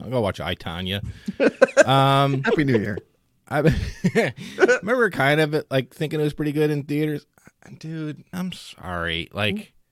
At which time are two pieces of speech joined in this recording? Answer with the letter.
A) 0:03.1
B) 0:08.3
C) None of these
B